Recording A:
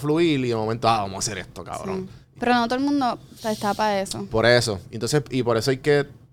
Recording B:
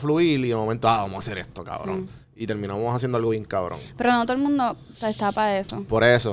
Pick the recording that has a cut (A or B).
A